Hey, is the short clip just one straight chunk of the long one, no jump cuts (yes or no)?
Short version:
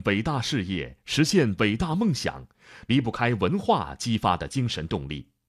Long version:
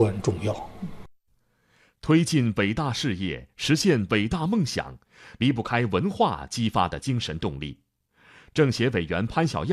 yes